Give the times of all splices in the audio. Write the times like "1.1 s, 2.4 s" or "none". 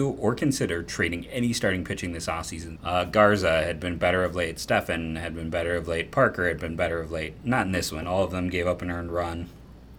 2.8 s